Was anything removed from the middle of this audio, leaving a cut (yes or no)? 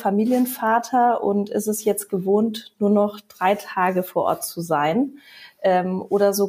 no